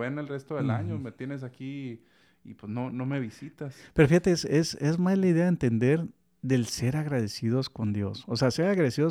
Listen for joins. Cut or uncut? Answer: cut